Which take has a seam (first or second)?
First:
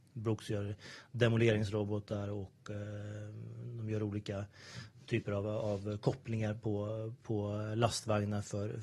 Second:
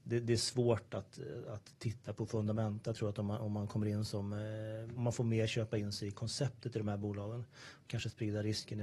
second